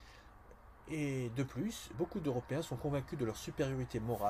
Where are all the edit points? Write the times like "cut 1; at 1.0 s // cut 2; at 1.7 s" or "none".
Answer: cut 1; at 1.9 s